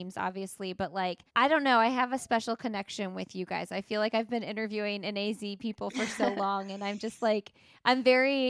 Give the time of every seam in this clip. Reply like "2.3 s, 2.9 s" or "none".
1.3 s